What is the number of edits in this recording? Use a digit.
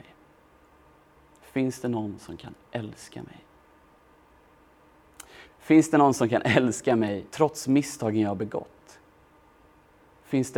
2